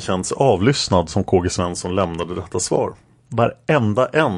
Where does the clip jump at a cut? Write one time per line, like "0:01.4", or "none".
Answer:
0:03.2